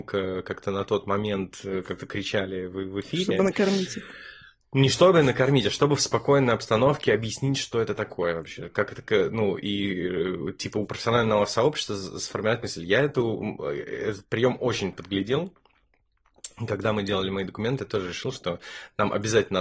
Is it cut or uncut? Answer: uncut